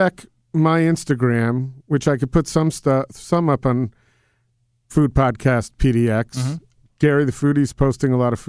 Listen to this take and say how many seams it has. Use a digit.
1